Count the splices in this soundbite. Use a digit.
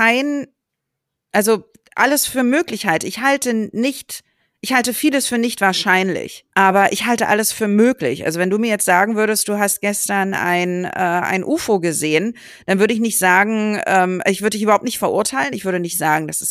1